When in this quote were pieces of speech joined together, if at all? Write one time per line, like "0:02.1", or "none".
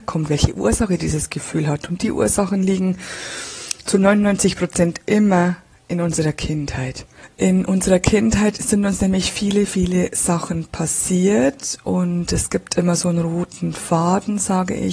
none